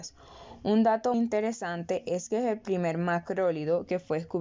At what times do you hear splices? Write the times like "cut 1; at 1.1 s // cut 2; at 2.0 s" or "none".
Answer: cut 1; at 1.1 s